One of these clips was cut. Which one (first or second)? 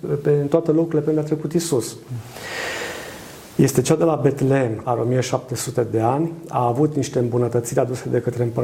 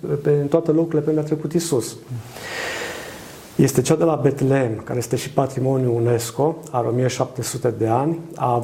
first